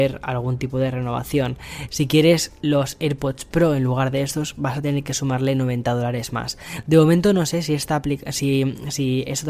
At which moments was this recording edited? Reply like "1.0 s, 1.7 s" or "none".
1.9 s